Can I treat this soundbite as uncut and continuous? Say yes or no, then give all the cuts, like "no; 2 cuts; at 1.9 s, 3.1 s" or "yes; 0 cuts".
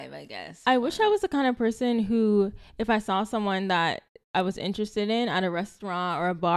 yes; 0 cuts